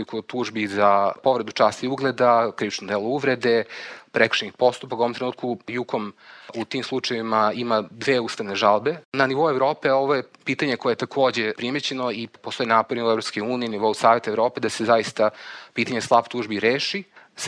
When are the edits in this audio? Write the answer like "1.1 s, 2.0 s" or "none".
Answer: none